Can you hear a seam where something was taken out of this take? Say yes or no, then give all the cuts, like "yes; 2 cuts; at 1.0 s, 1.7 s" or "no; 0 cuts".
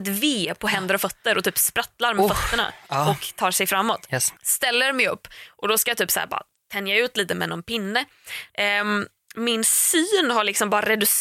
yes; 2 cuts; at 4.4 s, 8.5 s